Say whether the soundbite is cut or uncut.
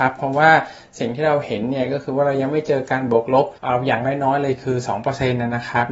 cut